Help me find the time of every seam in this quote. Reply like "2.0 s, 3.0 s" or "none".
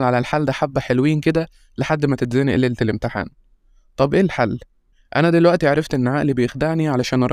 none